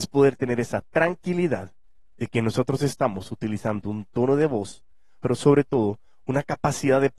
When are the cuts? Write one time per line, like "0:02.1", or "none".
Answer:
0:05.2